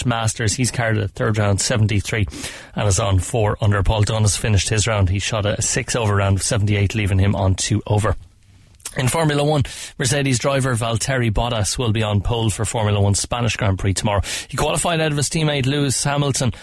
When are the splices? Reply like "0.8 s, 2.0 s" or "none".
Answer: none